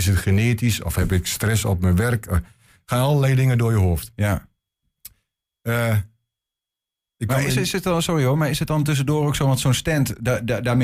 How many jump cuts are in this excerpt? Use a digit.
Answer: 0